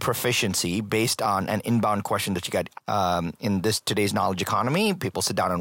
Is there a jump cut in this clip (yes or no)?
yes